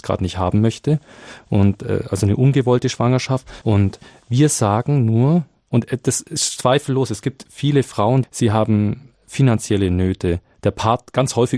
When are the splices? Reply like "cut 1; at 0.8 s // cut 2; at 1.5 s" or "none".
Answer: cut 1; at 3.6 s // cut 2; at 8.2 s